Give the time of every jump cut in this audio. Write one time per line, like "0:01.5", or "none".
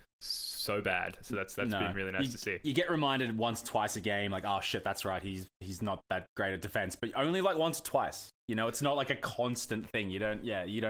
none